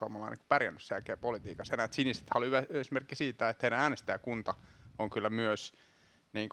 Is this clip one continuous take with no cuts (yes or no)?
yes